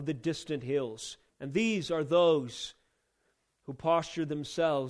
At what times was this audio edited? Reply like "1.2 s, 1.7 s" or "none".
1.3 s